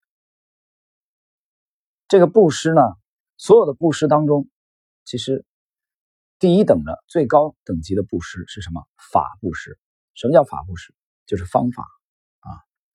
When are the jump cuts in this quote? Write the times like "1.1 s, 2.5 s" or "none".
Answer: none